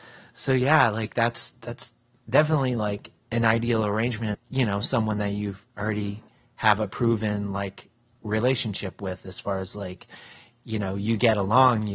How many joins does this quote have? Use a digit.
2